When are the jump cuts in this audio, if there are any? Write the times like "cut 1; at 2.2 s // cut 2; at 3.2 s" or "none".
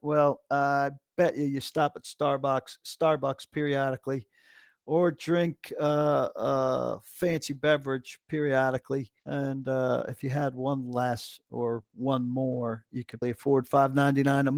cut 1; at 9.2 s // cut 2; at 13.2 s